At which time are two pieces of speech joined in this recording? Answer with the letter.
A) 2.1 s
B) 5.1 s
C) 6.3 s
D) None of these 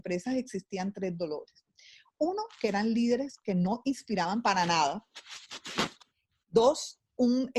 D